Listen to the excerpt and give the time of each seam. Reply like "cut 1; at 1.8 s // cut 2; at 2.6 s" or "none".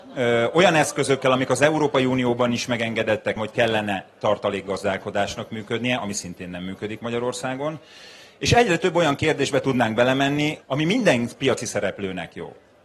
cut 1; at 3.4 s // cut 2; at 10.6 s